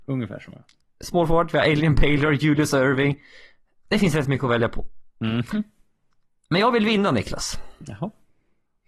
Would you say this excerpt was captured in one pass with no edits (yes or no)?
yes